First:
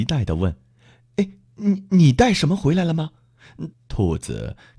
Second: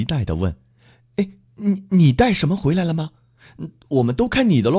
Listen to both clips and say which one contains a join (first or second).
first